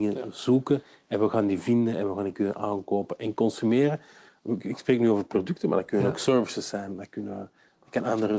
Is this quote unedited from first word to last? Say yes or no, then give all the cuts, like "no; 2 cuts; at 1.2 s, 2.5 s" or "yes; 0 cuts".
yes; 0 cuts